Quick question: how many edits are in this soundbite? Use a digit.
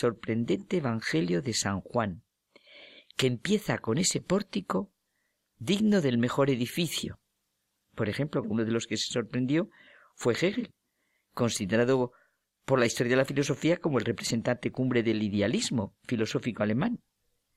1